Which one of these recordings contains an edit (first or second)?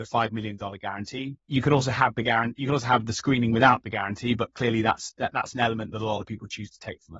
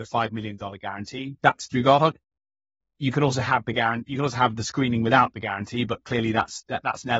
first